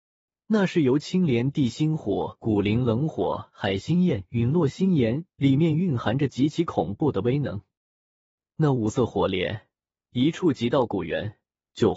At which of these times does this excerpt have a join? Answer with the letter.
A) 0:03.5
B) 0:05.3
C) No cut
B